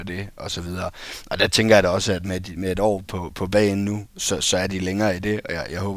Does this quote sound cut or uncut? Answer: uncut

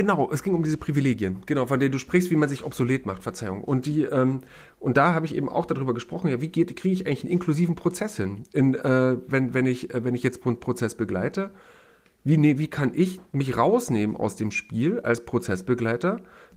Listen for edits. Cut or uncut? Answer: uncut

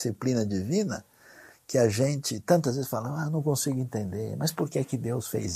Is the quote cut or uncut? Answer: uncut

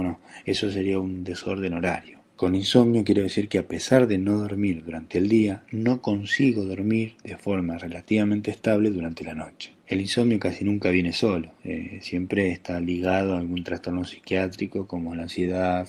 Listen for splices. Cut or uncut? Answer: uncut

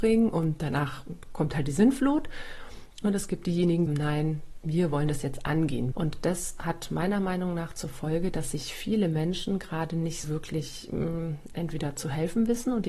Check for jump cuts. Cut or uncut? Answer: cut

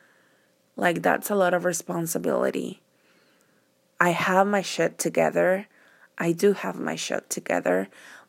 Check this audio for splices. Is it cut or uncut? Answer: cut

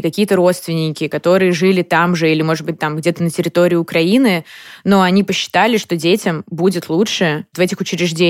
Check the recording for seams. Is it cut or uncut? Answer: uncut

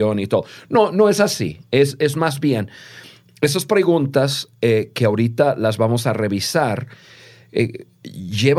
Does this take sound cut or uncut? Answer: uncut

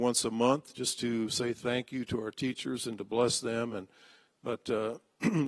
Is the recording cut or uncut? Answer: uncut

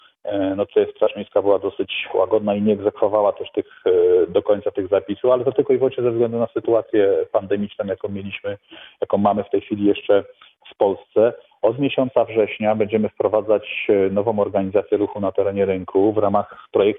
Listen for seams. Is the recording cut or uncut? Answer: uncut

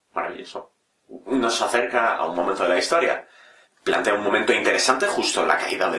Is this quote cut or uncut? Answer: cut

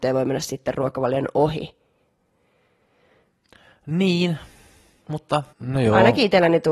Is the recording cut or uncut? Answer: cut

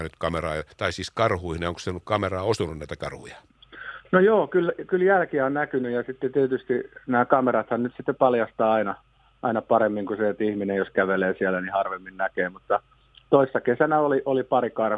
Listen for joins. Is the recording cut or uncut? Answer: uncut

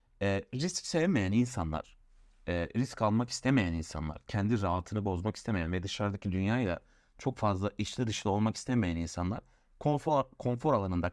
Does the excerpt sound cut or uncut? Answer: uncut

